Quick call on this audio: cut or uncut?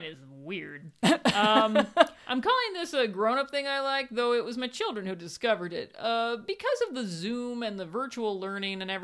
uncut